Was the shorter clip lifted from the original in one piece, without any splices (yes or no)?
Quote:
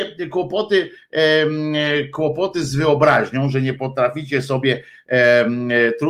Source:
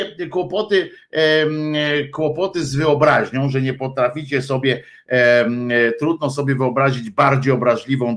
yes